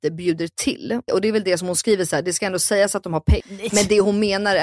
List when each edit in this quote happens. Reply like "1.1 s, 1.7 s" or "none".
1.1 s, 3.4 s